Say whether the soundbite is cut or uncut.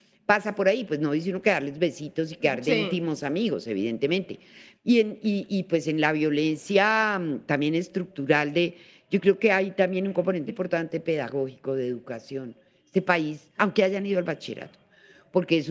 cut